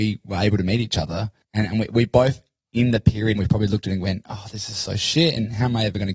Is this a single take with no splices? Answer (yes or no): no